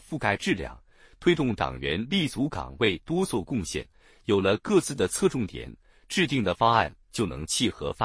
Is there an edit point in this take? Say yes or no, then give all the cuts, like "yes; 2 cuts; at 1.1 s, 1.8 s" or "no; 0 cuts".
no; 0 cuts